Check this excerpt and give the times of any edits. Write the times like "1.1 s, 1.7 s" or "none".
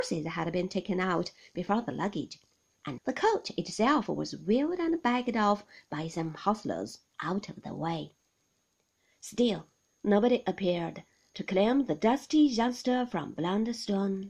3.0 s